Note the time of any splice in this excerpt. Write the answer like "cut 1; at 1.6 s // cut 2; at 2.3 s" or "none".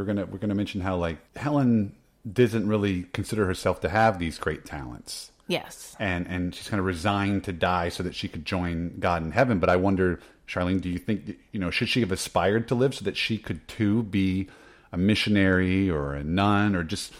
cut 1; at 1.2 s